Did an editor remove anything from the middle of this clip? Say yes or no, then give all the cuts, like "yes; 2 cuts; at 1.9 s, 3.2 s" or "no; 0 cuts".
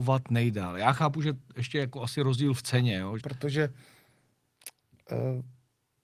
yes; 1 cut; at 3.2 s